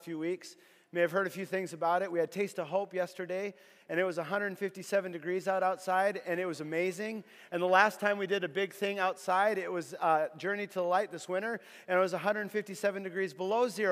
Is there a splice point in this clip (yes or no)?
no